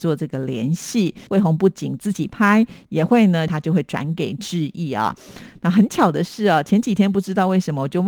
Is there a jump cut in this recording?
yes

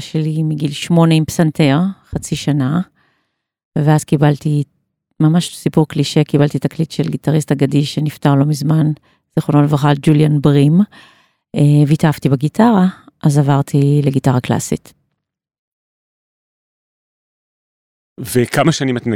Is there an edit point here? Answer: no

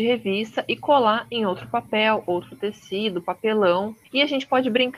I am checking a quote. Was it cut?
yes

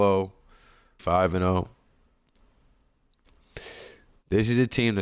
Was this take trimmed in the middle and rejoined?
yes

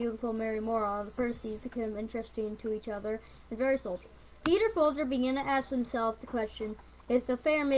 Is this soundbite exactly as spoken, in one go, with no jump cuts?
yes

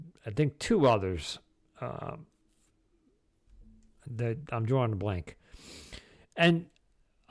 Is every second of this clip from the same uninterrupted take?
yes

